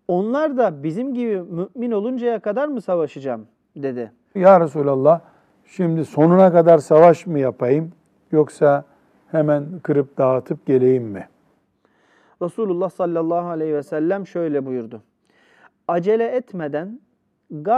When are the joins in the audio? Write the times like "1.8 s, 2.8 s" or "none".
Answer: 4.4 s